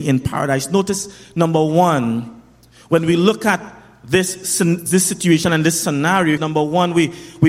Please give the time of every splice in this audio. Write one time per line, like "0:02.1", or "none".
0:06.4